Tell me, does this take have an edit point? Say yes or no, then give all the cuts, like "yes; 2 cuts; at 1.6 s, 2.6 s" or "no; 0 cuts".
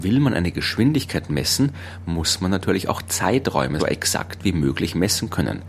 yes; 1 cut; at 3.8 s